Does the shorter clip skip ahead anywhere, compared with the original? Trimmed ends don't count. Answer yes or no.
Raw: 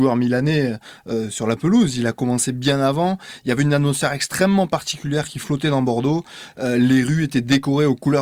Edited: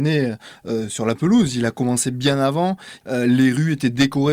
yes